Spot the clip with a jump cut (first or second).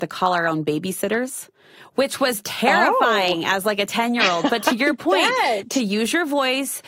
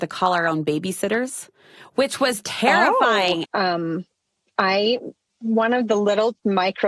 second